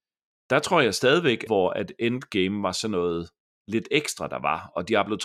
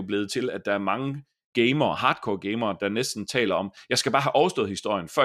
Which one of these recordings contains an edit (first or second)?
first